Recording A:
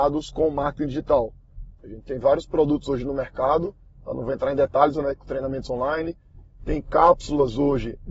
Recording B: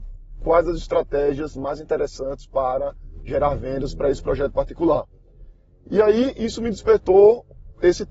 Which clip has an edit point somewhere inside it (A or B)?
A